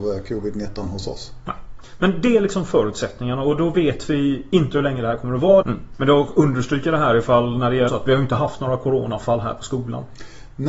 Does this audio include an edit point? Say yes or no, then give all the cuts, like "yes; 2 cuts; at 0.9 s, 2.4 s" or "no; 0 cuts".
yes; 2 cuts; at 5.6 s, 7.9 s